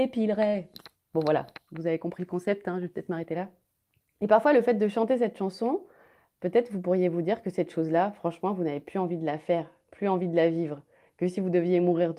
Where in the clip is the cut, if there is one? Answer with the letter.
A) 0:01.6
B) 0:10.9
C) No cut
C